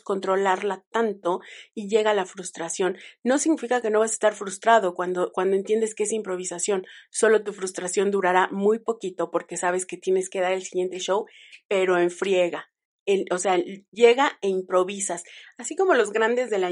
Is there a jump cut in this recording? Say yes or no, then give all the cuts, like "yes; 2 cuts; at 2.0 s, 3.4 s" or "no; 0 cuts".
no; 0 cuts